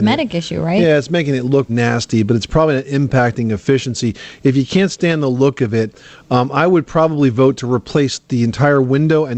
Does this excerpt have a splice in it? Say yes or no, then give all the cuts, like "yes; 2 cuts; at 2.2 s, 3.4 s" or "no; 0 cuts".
yes; 1 cut; at 1.7 s